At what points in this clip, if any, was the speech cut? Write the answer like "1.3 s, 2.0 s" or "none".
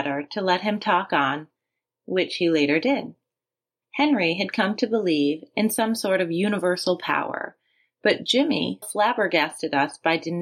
1.9 s, 3.8 s, 8.8 s